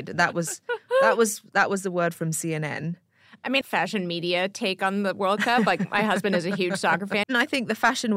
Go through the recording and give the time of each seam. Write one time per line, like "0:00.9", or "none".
0:03.6
0:07.2